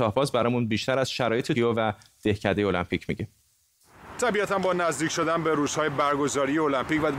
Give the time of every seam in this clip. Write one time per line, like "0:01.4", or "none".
0:01.5